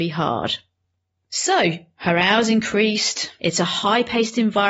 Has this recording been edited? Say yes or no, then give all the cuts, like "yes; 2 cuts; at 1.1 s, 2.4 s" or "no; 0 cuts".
yes; 2 cuts; at 1.2 s, 3.4 s